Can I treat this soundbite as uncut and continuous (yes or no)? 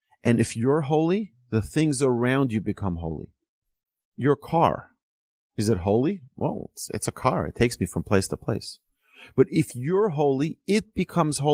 no